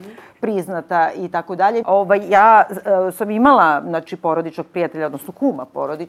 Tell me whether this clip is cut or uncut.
cut